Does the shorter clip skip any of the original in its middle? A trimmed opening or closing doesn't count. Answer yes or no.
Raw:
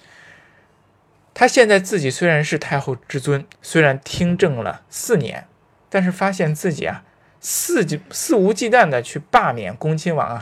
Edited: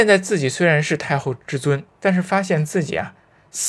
yes